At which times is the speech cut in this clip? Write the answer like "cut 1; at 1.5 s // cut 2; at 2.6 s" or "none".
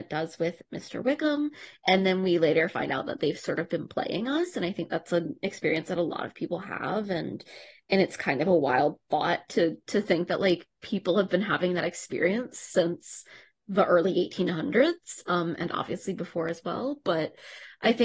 none